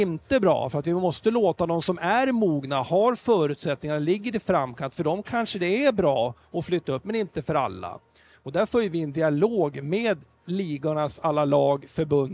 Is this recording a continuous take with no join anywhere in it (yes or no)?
yes